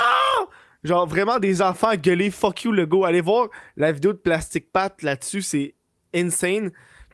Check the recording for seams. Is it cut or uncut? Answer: uncut